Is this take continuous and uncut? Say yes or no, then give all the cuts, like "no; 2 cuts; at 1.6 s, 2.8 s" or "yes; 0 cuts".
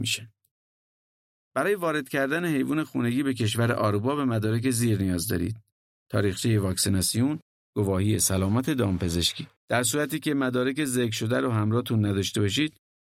no; 1 cut; at 9.6 s